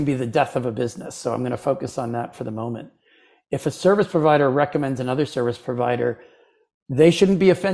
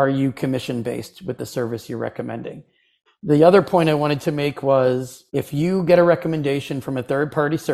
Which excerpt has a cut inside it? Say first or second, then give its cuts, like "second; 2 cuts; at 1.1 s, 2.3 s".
second; 2 cuts; at 3.1 s, 5.3 s